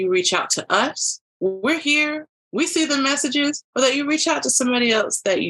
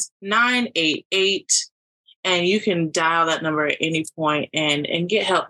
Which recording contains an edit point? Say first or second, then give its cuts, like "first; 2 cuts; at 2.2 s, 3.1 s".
first; 2 cuts; at 1.3 s, 3.7 s